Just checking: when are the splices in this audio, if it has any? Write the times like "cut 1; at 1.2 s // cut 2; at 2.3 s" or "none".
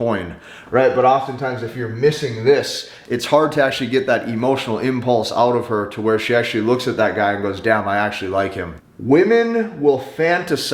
cut 1; at 8.8 s